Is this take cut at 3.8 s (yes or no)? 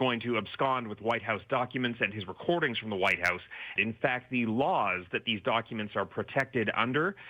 yes